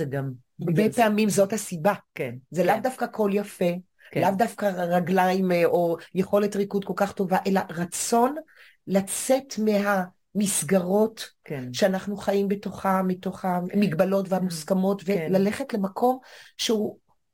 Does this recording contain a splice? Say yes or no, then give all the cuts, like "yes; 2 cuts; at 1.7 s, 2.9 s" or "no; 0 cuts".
no; 0 cuts